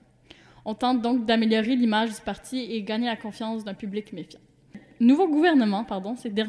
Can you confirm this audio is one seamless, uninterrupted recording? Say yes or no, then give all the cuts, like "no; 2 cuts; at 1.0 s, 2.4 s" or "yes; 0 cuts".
yes; 0 cuts